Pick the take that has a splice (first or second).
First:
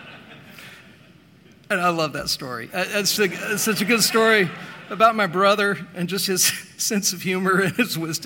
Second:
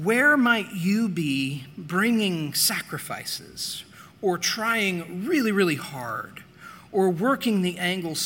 first